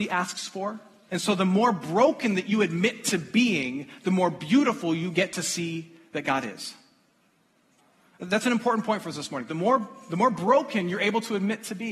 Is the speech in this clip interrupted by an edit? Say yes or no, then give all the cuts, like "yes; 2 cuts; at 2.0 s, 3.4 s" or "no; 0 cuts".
yes; 1 cut; at 1.1 s